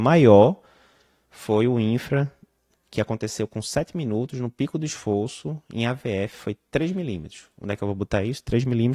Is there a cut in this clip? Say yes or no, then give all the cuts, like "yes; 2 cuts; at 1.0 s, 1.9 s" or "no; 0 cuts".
no; 0 cuts